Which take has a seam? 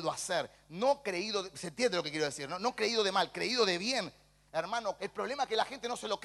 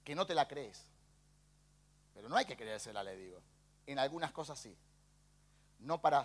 first; 1 cut; at 5.0 s

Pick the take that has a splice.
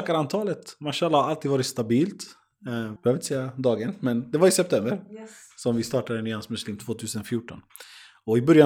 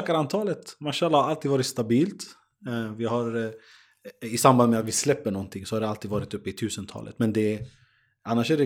first; 1 cut; at 3.0 s

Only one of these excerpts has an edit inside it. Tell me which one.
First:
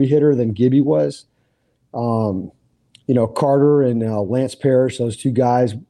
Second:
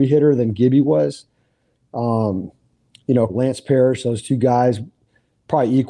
second; 1 cut; at 3.3 s

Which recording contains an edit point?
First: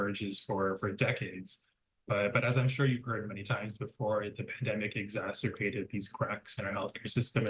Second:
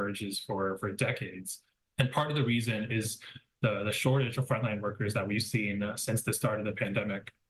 second; 1 cut; at 1.9 s

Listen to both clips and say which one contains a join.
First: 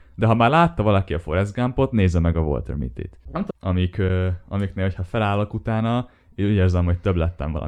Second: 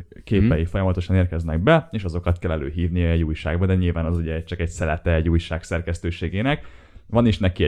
first; 1 cut; at 3.5 s

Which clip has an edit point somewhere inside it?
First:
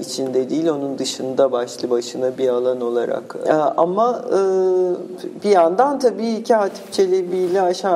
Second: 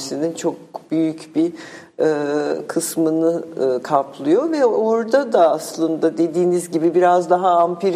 first; 2 cuts; at 2.3 s, 3.4 s

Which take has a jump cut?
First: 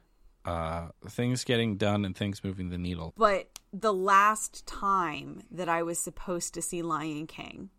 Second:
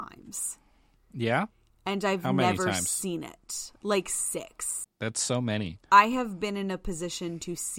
first; 1 cut; at 3.1 s

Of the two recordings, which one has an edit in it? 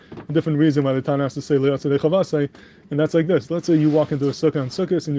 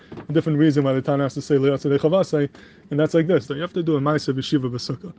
second; 1 cut; at 3.5 s

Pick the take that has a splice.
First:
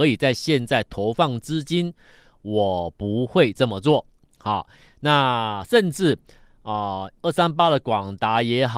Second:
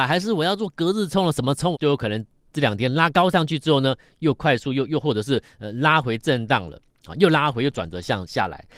second; 1 cut; at 1.7 s

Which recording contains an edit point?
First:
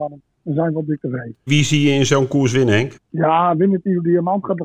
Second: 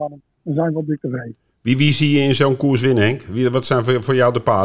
first; 2 cuts; at 1.5 s, 2.9 s

